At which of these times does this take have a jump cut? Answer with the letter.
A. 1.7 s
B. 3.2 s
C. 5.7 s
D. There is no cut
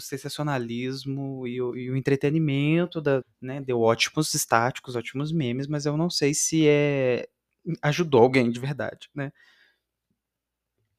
B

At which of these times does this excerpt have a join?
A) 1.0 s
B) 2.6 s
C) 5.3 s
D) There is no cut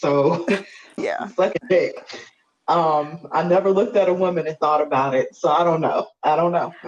A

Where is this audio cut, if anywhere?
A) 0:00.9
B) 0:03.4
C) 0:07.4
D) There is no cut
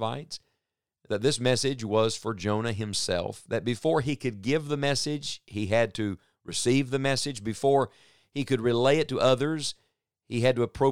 D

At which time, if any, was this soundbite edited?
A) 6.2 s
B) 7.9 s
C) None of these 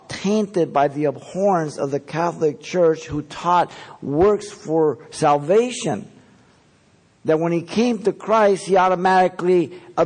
C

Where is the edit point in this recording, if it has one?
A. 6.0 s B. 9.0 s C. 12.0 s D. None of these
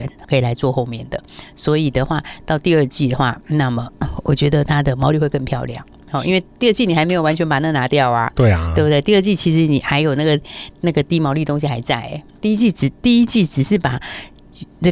D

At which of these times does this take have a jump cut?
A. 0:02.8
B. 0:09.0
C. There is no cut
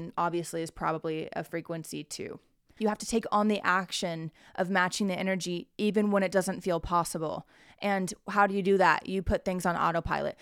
A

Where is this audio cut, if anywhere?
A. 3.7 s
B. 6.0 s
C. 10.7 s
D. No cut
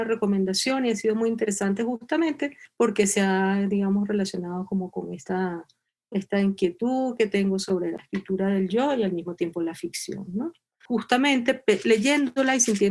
D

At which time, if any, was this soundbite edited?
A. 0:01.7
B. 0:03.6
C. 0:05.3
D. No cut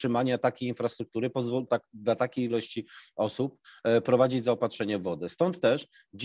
A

